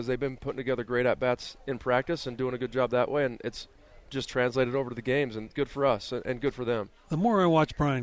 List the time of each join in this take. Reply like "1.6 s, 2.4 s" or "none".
none